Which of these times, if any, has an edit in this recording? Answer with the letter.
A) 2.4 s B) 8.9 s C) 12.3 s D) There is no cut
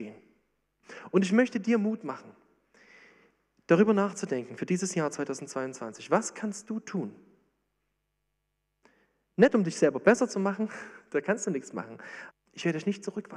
C